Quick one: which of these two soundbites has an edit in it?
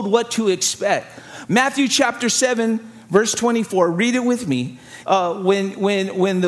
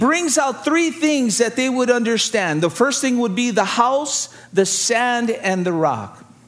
first; 2 cuts; at 1.5 s, 5.0 s

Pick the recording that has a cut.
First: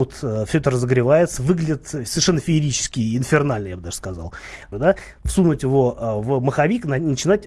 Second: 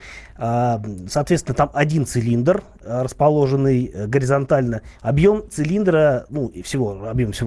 first; 1 cut; at 4.7 s

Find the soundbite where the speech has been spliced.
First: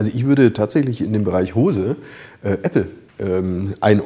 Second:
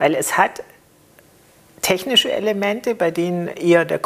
first; 1 cut; at 3.1 s

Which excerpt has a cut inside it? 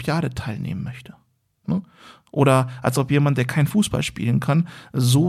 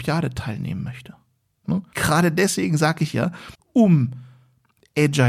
second; 2 cuts; at 1.9 s, 3.5 s

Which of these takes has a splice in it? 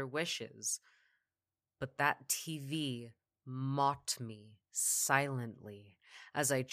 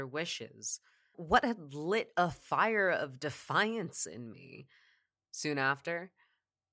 second; 2 cuts; at 1.1 s, 5.3 s

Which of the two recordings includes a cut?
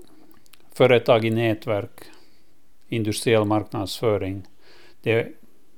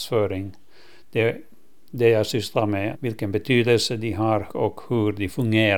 second; 2 cuts; at 2.9 s, 4.5 s

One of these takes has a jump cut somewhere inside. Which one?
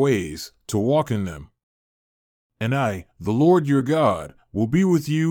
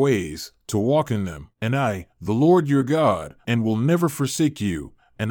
second; 2 cuts; at 1.5 s, 3.4 s

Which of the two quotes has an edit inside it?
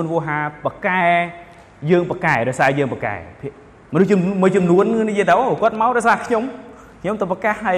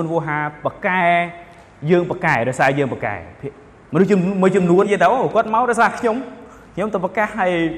second; 1 cut; at 4.8 s

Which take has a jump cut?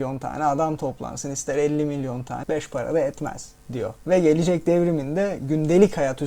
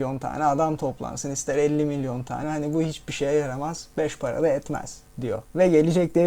first; 1 cut; at 2.4 s

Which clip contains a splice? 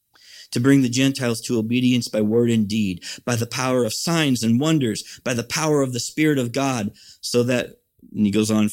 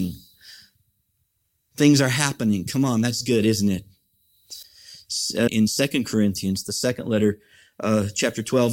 second; 1 cut; at 5.5 s

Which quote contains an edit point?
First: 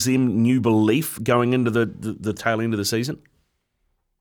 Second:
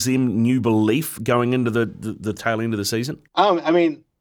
second; 1 cut; at 3.3 s

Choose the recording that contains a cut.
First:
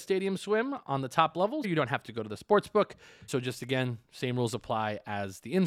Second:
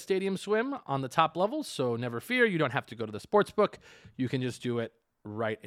first; 2 cuts; at 1.6 s, 3.3 s

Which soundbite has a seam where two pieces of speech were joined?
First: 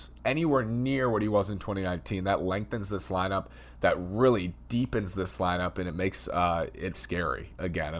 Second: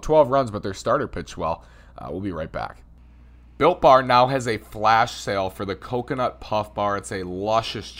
first; 1 cut; at 6.9 s

